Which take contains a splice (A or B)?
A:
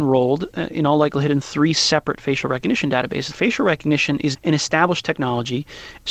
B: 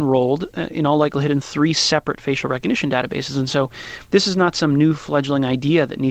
A